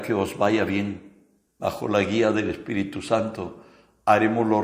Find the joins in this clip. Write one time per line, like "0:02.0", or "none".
0:01.5